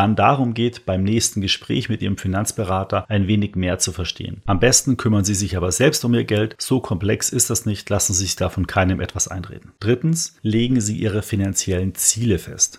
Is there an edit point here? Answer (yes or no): no